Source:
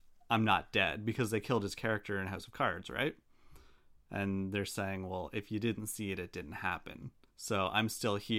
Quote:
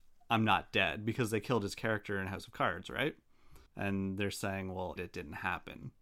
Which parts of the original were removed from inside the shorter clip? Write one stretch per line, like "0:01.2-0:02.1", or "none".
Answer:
0:03.7-0:04.0
0:05.3-0:06.2